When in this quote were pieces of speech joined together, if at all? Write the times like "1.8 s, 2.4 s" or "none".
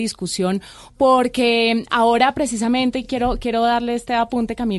none